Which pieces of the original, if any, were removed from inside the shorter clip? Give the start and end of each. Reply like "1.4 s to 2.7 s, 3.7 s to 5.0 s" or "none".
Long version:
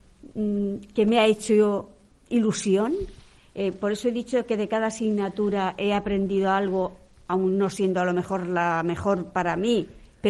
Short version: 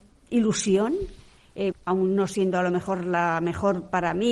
3.7 s to 7.1 s